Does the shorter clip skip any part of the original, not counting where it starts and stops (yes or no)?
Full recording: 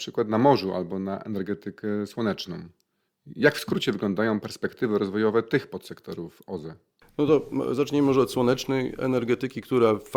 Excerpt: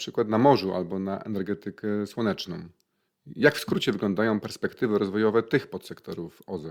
no